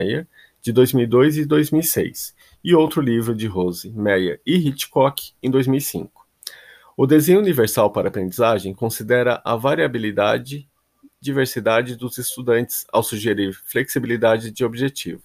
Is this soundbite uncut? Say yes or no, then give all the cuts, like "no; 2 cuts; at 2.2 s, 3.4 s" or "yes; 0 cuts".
yes; 0 cuts